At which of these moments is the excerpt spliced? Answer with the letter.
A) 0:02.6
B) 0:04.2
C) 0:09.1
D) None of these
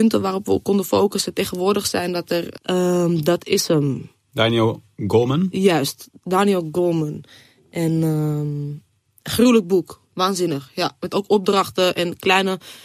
A